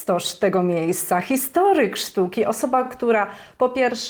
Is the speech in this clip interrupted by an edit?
no; 0 cuts

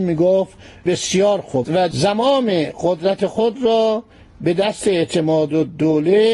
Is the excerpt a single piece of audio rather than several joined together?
yes; 0 cuts

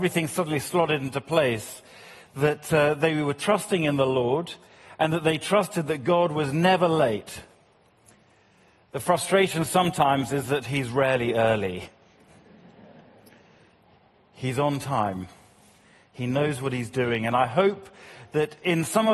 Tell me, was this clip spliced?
no; 0 cuts

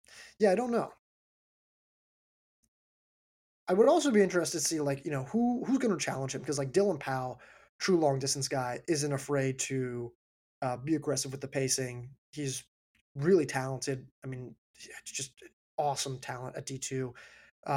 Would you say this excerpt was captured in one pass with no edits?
yes; 0 cuts

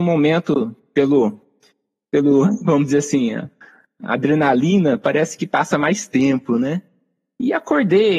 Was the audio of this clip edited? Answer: no; 0 cuts

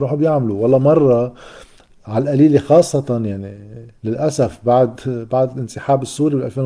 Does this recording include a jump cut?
no; 0 cuts

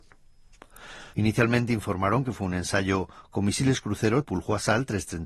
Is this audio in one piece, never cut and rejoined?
no; 2 cuts; at 1.1 s, 4.2 s

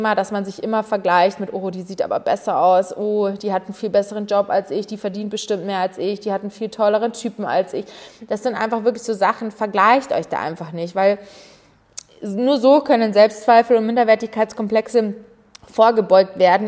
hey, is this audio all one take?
yes; 0 cuts

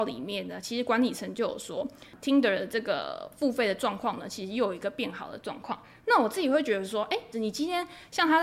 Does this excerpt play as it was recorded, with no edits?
no; 1 cut; at 7.3 s

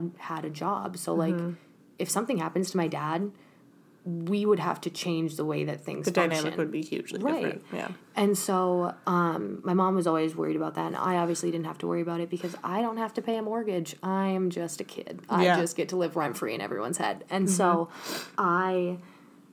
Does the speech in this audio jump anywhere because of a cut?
no; 0 cuts

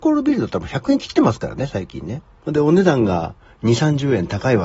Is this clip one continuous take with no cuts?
no; 1 cut; at 2.4 s

